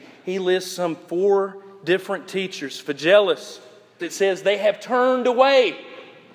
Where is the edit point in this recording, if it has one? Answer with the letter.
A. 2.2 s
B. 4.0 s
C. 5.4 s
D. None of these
B